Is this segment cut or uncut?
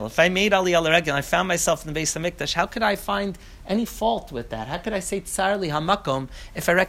uncut